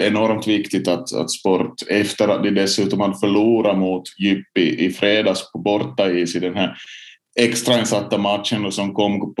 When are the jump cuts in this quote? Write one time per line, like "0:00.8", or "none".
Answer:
none